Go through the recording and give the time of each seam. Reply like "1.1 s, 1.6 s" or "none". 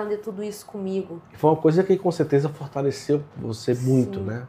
1.2 s